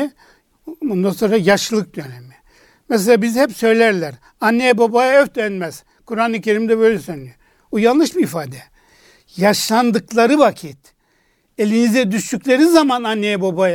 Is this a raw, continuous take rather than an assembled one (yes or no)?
yes